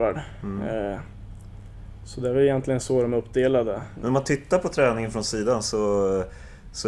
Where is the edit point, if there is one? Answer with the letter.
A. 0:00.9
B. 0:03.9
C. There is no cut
B